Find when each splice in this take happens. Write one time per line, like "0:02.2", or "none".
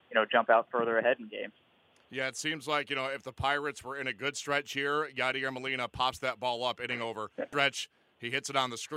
0:07.5

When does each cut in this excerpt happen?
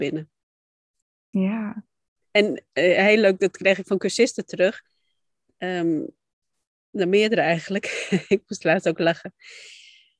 none

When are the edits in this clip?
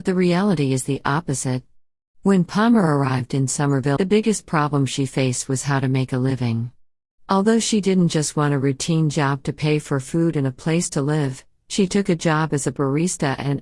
0:04.0

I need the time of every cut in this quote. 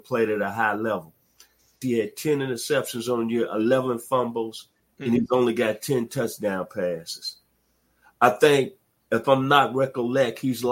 0:01.8

